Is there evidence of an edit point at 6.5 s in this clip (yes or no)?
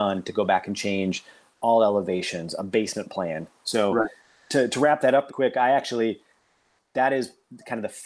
no